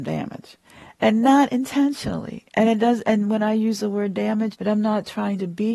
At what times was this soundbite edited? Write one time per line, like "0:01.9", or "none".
0:04.5